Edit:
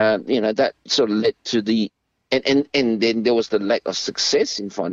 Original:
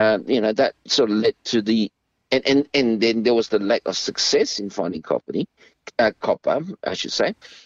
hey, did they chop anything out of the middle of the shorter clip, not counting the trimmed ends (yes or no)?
no